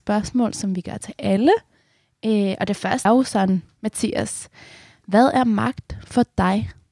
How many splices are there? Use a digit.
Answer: 1